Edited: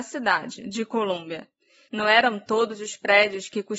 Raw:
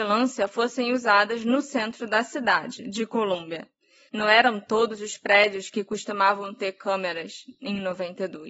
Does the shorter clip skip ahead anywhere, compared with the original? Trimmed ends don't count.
no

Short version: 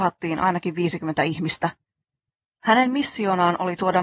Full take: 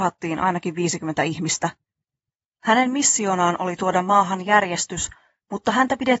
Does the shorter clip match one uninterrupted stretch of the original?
yes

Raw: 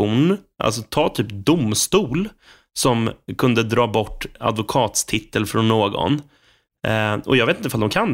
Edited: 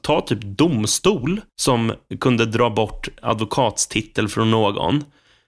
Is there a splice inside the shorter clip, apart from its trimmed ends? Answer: yes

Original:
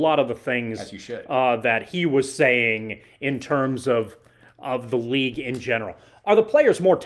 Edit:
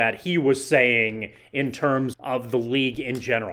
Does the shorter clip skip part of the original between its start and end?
yes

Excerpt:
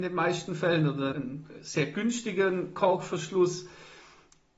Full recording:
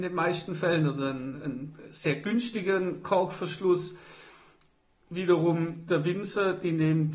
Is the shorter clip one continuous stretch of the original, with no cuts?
no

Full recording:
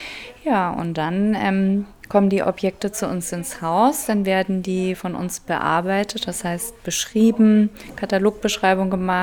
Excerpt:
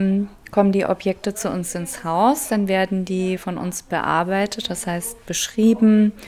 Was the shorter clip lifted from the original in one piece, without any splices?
yes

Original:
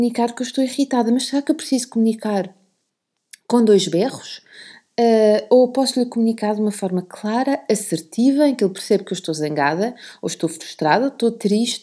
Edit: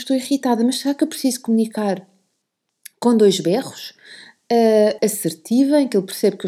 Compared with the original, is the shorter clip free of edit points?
no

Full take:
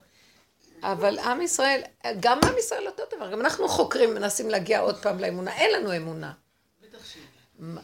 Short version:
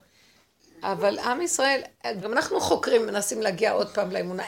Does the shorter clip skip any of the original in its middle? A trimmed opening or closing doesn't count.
yes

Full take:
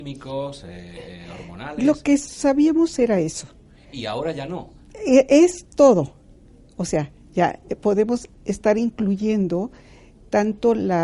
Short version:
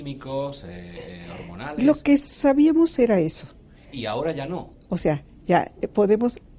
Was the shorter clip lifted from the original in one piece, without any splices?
no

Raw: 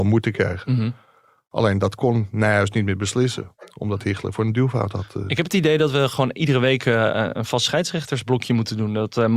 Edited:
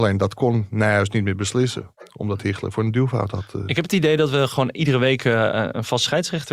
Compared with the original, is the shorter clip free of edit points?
yes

